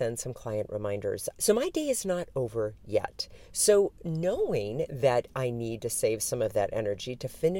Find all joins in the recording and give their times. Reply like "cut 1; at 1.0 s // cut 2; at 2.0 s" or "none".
cut 1; at 1.3 s